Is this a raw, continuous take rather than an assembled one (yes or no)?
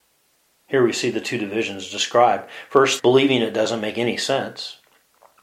no